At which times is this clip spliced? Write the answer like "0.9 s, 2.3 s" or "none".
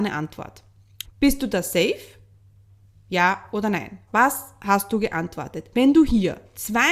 1.0 s, 4.1 s